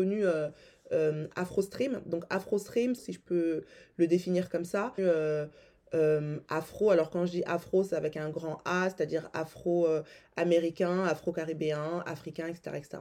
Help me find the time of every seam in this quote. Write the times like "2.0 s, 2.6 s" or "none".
3.0 s, 5.0 s